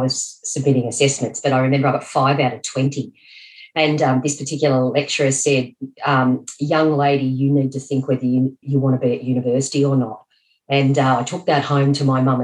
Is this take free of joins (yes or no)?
no